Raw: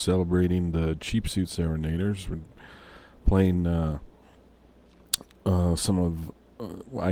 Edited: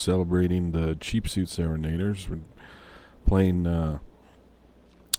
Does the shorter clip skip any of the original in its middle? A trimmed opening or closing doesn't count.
no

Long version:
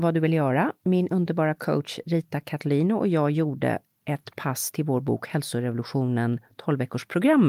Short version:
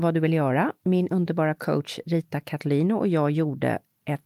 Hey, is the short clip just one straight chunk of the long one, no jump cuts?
yes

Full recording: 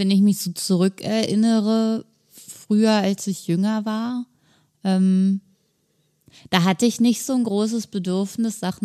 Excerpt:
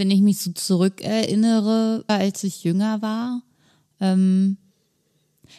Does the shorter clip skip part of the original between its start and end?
yes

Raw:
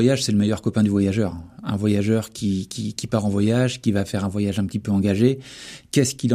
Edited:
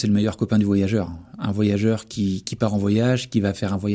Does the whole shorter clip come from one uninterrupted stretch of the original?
no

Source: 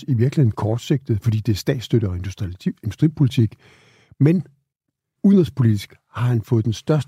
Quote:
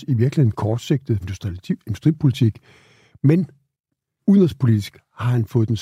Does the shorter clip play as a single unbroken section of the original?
no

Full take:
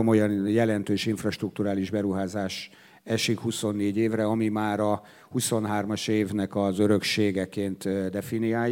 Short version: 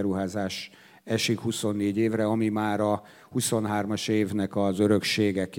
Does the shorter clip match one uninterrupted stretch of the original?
yes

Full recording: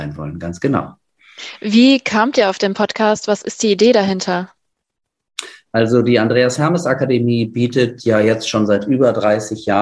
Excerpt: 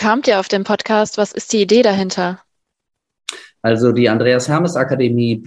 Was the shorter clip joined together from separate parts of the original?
no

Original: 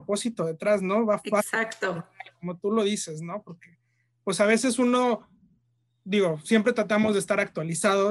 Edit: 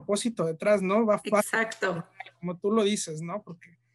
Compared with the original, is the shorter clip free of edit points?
yes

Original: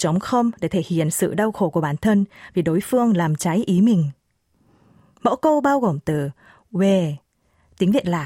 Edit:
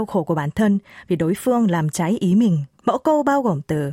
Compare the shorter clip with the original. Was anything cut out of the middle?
yes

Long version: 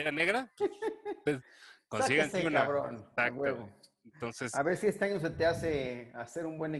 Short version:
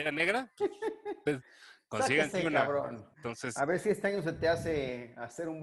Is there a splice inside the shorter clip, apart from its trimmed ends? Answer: yes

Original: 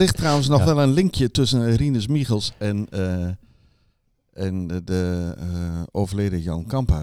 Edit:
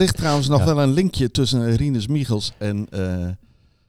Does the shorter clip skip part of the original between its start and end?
no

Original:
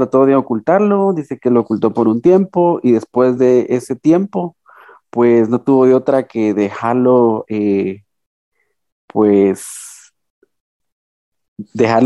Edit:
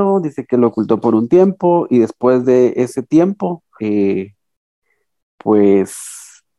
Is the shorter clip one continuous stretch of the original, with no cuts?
no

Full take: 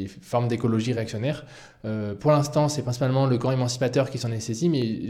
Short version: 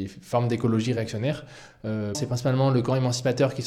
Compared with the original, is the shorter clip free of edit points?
no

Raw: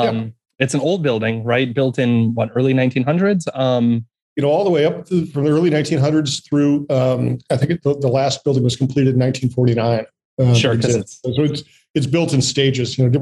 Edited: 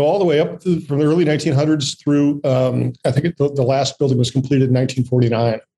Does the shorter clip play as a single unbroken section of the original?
yes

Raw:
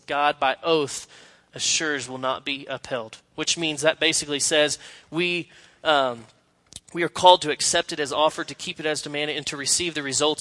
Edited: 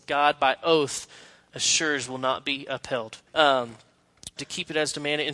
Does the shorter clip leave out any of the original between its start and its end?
yes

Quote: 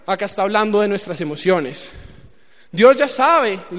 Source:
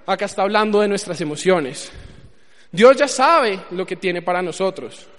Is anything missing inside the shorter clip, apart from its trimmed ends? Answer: no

